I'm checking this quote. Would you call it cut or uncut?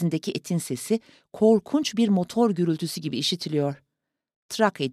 uncut